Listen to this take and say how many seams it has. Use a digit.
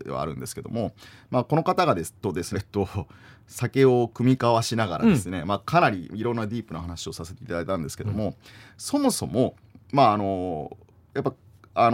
1